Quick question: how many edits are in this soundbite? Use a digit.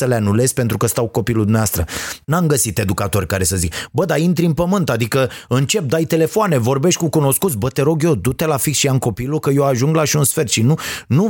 1